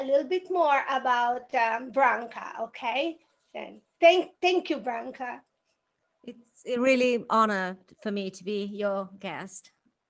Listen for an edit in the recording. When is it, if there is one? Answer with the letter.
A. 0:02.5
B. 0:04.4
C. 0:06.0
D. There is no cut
D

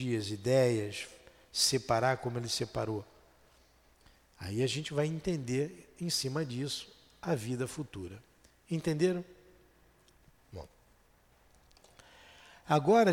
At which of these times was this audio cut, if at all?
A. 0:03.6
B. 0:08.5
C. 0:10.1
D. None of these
D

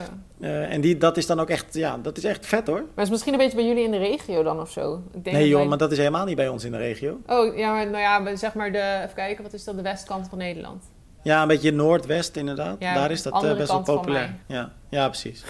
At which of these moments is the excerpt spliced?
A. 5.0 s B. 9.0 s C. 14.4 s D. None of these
C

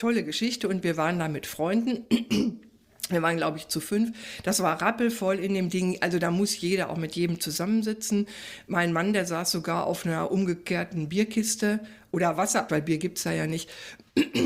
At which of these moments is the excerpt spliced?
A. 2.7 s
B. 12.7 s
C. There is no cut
B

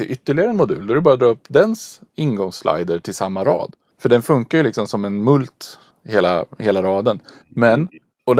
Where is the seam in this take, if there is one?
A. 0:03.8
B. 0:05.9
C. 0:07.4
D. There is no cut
D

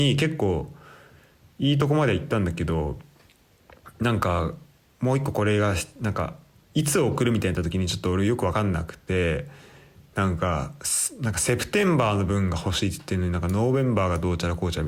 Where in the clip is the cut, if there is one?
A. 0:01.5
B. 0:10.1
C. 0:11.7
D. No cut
D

